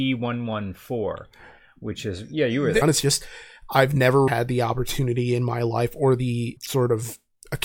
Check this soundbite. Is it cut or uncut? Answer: cut